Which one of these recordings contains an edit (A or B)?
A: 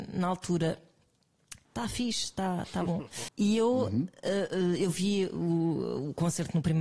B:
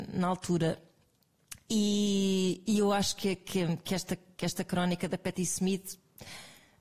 A